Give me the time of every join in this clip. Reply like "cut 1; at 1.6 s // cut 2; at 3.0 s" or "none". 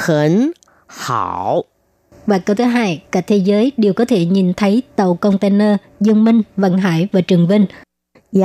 cut 1; at 2.1 s